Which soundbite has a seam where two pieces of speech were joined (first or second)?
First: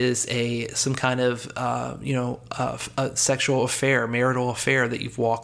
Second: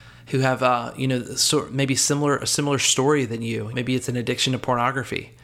second